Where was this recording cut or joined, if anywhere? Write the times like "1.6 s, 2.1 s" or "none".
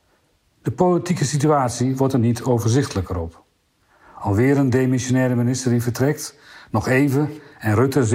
none